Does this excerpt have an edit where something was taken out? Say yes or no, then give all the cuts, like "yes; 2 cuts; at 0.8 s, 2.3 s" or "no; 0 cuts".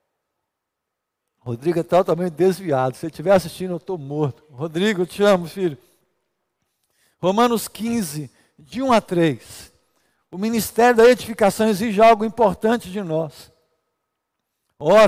no; 0 cuts